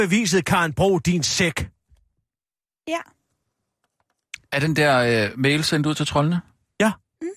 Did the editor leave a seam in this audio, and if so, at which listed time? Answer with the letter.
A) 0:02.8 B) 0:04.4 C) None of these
B